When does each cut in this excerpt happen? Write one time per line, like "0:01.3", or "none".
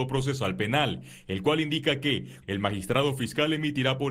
0:02.4